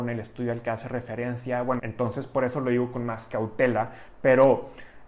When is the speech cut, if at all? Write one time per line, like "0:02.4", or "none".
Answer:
0:01.8